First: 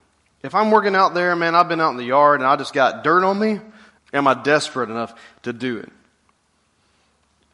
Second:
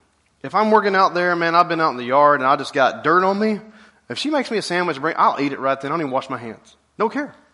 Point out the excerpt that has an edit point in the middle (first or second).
first